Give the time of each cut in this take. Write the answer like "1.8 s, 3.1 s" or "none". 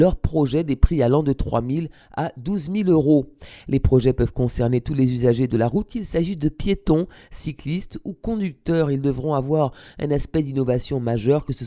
none